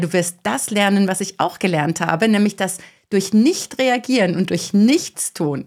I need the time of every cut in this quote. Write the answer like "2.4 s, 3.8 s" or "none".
none